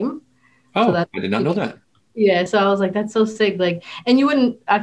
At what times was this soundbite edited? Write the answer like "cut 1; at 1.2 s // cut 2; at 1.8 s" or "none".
none